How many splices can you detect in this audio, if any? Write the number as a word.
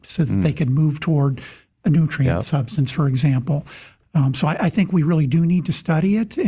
one